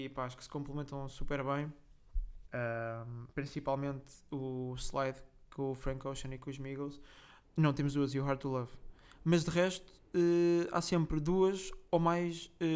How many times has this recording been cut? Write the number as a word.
two